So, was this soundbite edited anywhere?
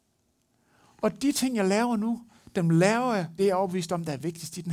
yes; 1 cut; at 3.4 s

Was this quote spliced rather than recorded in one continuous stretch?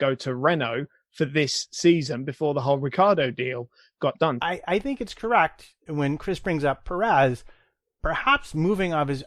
yes; 2 cuts; at 4.4 s, 5.9 s

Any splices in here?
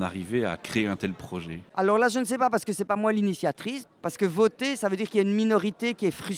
yes; 1 cut; at 3.8 s

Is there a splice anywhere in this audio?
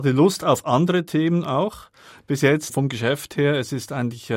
yes; 1 cut; at 2.1 s

